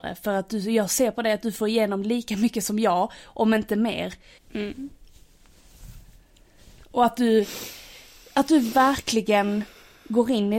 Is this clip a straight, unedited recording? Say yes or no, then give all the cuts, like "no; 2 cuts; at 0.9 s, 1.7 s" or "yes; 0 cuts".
no; 1 cut; at 4.4 s